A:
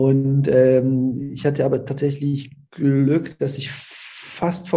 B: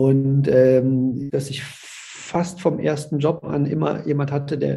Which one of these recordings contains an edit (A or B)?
B